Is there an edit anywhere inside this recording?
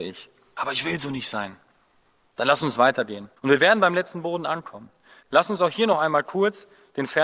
yes; 2 cuts; at 3.4 s, 5.2 s

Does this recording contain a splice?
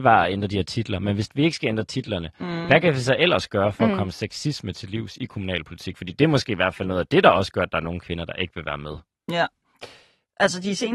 no; 0 cuts

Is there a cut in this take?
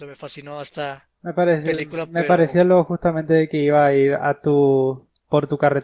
yes; 1 cut; at 1.1 s

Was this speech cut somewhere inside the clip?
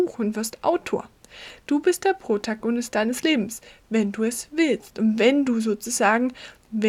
no; 0 cuts

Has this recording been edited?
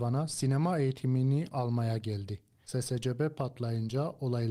no; 0 cuts

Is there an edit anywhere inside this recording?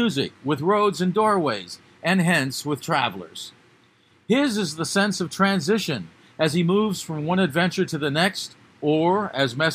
no; 0 cuts

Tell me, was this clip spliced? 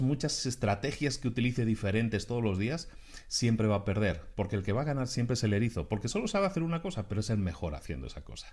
no; 0 cuts

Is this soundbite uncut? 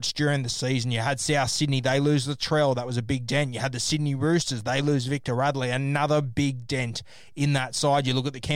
yes; 0 cuts

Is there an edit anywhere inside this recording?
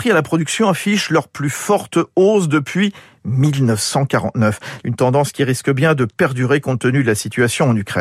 yes; 1 cut; at 4.8 s

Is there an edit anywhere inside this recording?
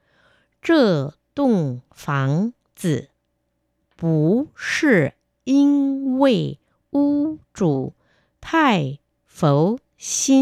no; 0 cuts

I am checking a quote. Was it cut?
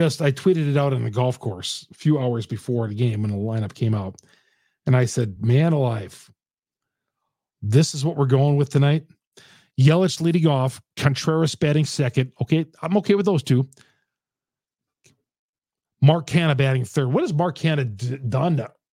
no; 0 cuts

